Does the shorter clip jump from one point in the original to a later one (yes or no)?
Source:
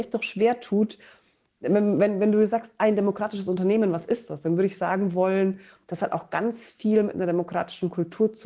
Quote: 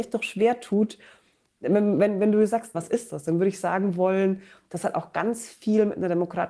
yes